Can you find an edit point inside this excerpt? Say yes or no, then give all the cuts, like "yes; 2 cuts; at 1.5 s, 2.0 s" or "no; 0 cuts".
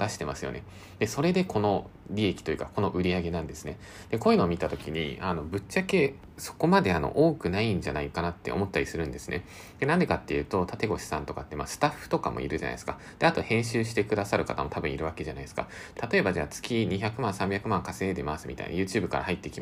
yes; 2 cuts; at 10.8 s, 16.0 s